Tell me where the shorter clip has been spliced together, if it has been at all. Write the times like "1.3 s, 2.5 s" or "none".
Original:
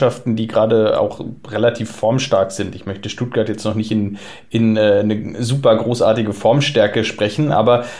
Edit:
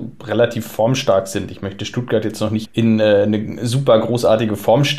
2.6 s